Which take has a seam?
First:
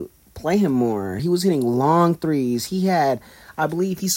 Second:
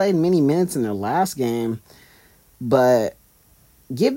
first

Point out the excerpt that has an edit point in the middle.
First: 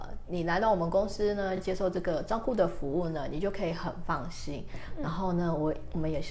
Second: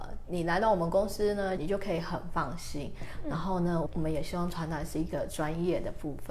second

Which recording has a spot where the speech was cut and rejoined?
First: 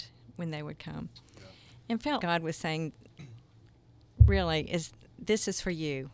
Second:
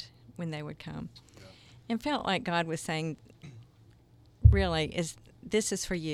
first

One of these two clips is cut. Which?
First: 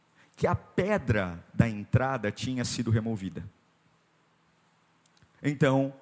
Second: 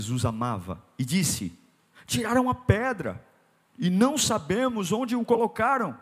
second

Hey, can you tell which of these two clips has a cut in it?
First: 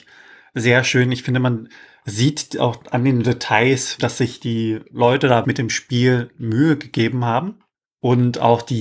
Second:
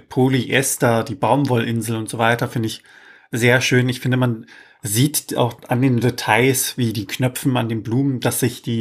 first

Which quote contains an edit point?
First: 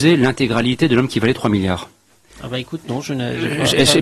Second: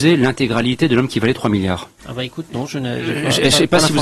second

